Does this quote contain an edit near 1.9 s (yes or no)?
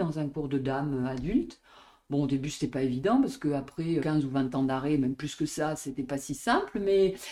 no